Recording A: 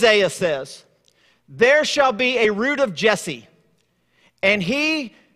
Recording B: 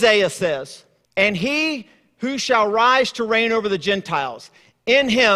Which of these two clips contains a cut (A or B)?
B